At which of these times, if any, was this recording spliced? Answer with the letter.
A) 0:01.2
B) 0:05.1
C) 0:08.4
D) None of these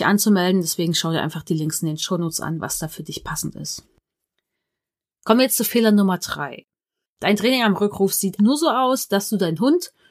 C